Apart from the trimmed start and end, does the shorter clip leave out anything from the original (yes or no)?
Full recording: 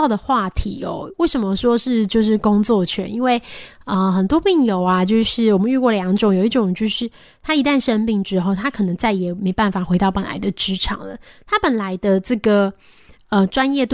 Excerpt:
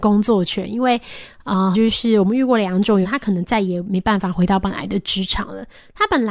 yes